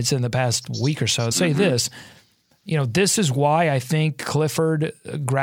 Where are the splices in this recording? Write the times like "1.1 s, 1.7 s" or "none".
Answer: 1.3 s

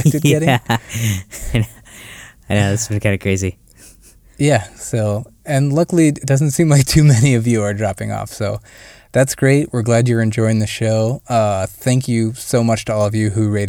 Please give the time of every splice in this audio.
none

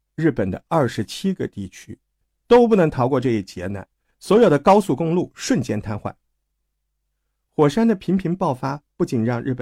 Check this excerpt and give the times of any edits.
none

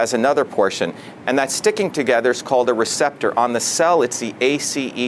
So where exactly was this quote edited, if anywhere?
1.2 s

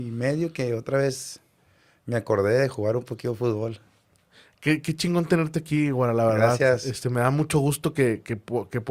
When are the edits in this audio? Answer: none

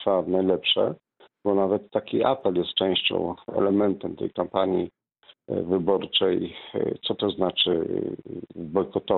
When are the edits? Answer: none

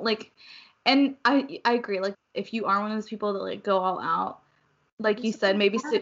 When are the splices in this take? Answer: 2.1 s

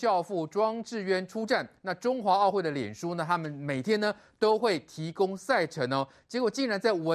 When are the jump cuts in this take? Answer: none

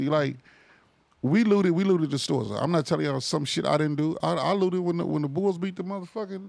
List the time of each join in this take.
none

